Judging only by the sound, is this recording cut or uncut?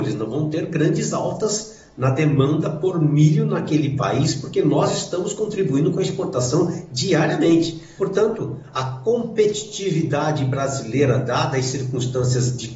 cut